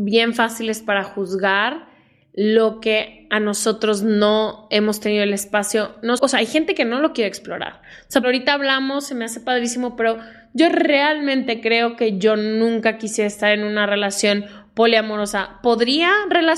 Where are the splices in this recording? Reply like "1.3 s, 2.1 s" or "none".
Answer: 6.2 s, 8.2 s